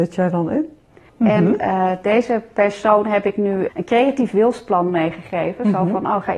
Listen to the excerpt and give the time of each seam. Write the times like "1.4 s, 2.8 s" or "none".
1.1 s, 3.7 s